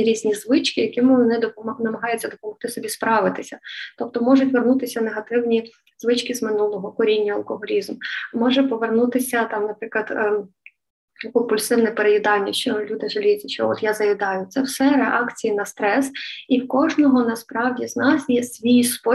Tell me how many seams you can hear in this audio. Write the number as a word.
zero